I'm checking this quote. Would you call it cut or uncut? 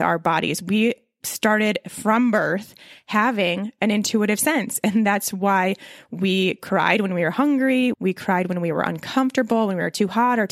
cut